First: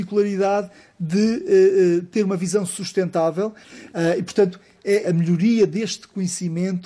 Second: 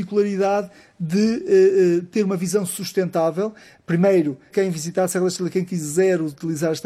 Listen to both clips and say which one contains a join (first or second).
first